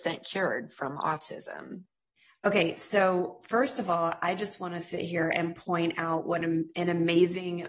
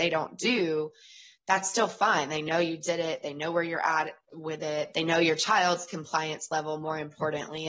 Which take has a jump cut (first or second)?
second